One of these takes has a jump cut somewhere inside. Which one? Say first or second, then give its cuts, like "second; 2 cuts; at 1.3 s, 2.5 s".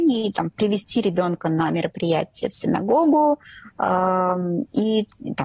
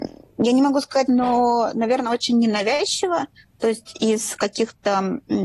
second; 1 cut; at 1.1 s